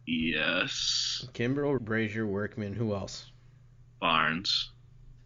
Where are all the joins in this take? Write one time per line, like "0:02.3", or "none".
0:01.8